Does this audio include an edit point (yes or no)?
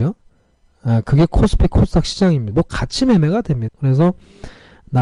yes